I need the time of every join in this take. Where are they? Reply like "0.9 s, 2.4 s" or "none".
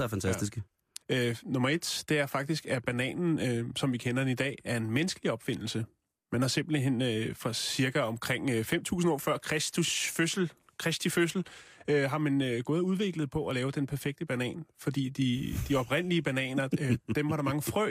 1.0 s